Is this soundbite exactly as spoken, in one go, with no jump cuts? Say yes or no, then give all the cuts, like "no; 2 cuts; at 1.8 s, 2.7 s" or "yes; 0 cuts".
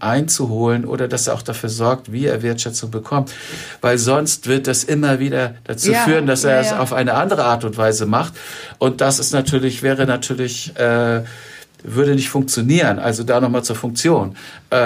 yes; 0 cuts